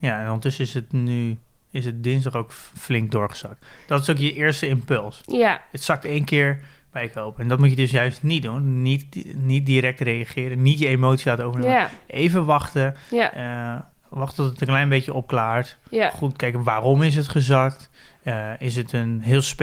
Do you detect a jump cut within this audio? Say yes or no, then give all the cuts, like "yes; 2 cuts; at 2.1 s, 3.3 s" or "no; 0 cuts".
no; 0 cuts